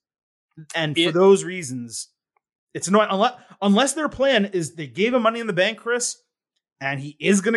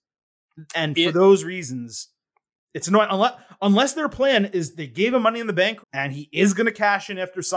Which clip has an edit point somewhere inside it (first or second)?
second